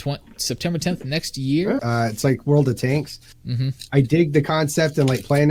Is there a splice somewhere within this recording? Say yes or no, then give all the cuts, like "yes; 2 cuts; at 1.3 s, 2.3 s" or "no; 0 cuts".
yes; 1 cut; at 1.8 s